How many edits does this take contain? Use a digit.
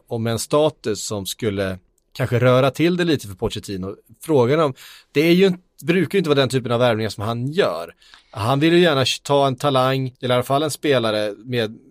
1